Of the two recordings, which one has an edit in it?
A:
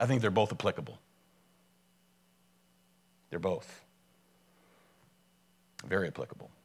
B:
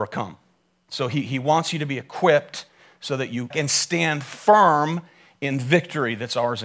B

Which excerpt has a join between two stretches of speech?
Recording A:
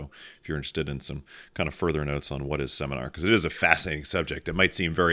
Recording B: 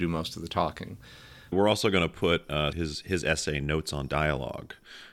B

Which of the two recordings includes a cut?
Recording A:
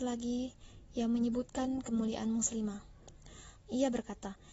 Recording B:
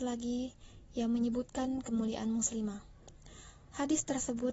A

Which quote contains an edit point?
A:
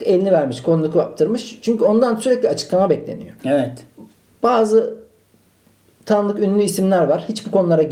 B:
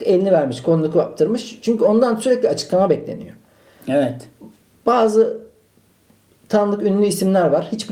A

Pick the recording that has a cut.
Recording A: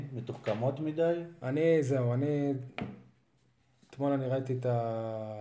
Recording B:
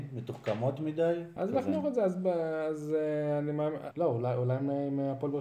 B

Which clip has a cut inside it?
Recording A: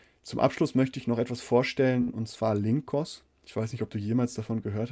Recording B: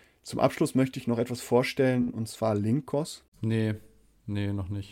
B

